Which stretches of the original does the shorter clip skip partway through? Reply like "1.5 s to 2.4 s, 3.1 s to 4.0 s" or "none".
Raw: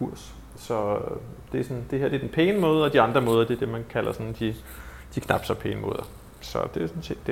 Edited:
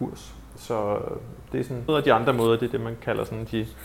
1.9 s to 2.8 s